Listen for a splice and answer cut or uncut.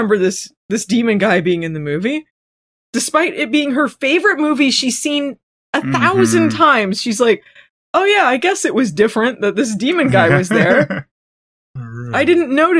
uncut